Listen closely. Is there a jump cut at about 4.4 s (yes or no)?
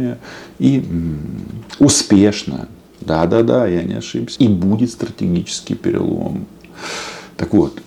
yes